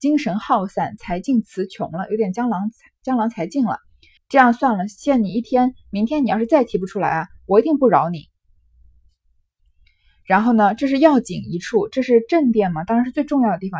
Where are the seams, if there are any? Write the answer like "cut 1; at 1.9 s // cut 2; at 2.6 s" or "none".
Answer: cut 1; at 4.2 s